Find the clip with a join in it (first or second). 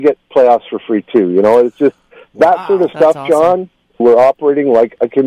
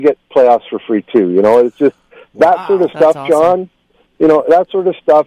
first